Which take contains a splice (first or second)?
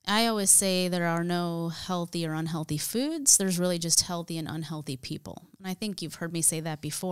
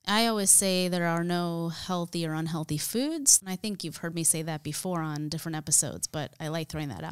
second